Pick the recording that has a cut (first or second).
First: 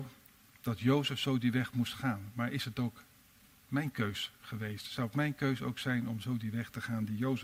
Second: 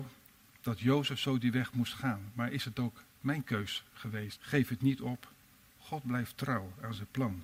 second